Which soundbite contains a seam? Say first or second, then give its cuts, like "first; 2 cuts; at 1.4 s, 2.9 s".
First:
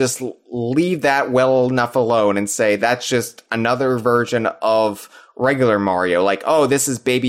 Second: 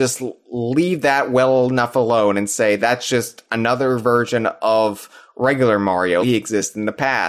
second; 1 cut; at 6.2 s